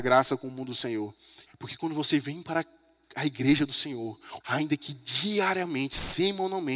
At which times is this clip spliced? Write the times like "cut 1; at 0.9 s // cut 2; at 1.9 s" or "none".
cut 1; at 1.5 s // cut 2; at 4.4 s